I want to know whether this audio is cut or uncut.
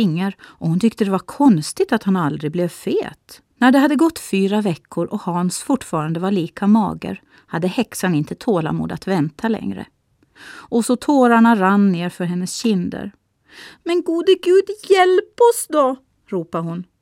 cut